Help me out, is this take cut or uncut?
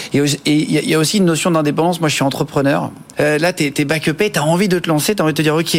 cut